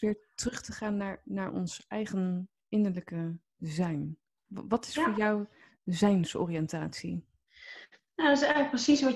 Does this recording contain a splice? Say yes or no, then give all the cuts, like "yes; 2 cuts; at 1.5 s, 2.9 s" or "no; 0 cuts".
no; 0 cuts